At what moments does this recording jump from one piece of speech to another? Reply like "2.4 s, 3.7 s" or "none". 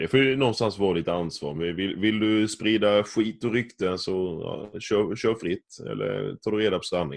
none